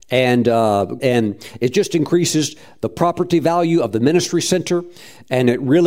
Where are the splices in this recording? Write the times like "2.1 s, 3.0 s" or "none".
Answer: 1.0 s